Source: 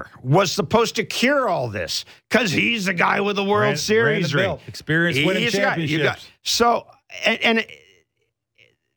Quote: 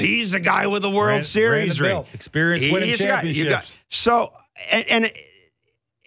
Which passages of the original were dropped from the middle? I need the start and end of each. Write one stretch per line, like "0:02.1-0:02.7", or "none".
none